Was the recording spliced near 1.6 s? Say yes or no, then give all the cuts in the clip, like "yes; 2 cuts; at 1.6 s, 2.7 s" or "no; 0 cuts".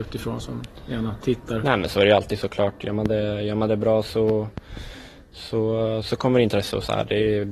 yes; 1 cut; at 1.6 s